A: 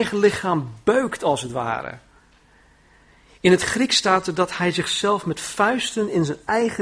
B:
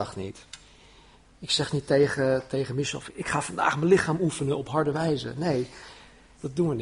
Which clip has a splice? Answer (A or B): B